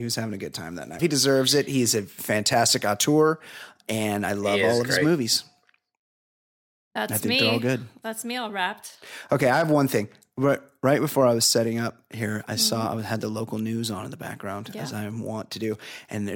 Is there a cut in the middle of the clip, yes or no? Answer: yes